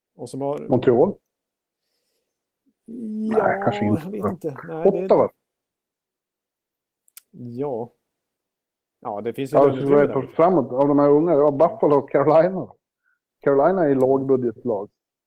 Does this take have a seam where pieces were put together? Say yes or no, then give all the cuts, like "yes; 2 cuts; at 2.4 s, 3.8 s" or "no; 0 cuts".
no; 0 cuts